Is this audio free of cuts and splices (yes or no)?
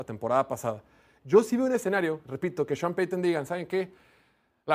yes